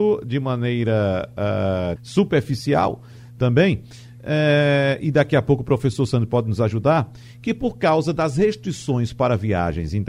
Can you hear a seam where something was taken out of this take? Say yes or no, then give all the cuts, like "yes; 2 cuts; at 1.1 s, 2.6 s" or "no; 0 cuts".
yes; 1 cut; at 2.0 s